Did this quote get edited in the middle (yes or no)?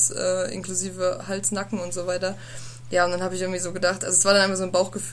no